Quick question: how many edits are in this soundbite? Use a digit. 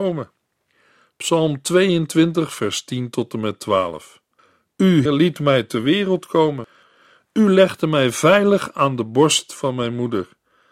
1